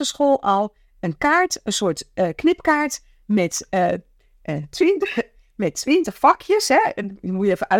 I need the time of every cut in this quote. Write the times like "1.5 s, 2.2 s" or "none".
none